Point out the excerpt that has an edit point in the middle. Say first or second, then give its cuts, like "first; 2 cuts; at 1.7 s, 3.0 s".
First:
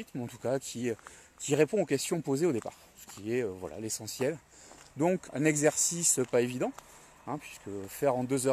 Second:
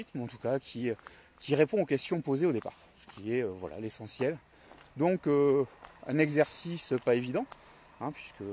first; 1 cut; at 5.3 s